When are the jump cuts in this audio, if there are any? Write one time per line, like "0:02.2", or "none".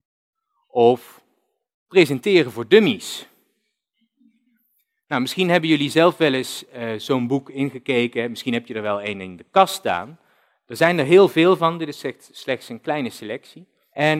none

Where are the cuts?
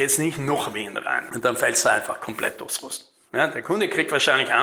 0:01.3
0:03.3

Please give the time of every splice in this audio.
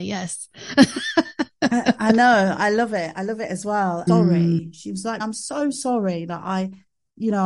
0:04.1
0:05.2

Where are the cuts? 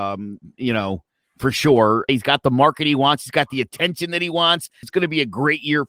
0:02.1
0:04.8

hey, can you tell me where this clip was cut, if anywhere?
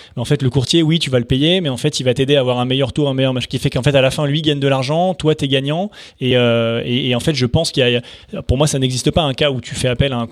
none

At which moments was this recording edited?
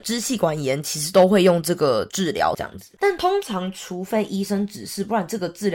none

